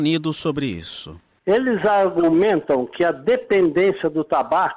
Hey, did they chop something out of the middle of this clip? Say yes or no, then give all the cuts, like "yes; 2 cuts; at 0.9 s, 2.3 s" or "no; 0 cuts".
no; 0 cuts